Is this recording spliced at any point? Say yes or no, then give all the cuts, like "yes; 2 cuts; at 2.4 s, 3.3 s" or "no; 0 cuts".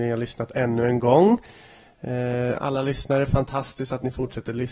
no; 0 cuts